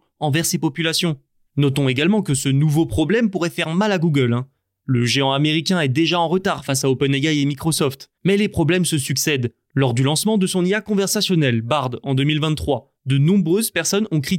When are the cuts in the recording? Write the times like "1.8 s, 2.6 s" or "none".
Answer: 8.2 s

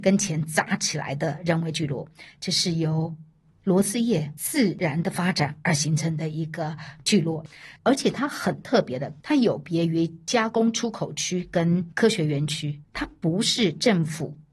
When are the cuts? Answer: 7.8 s, 9.2 s

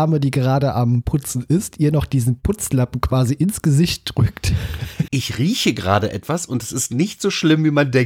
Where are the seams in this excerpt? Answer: 5.1 s

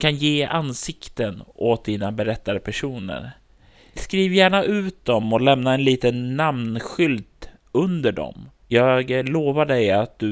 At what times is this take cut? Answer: none

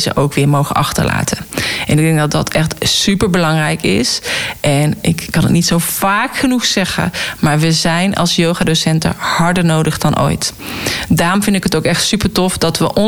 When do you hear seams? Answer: 5.3 s

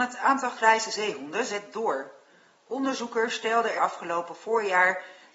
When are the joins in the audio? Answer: 3.8 s

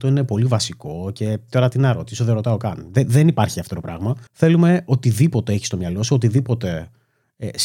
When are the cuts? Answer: 4.3 s

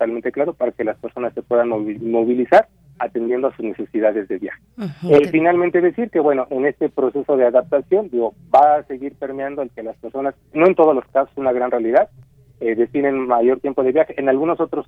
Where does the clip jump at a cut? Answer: none

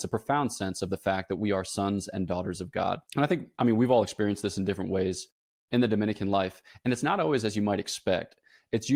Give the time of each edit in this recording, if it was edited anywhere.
3.1 s

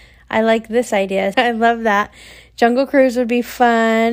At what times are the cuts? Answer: 1.3 s

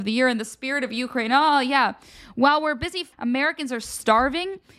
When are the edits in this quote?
3.1 s

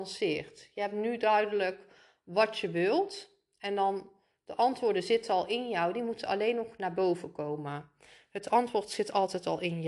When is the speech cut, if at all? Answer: none

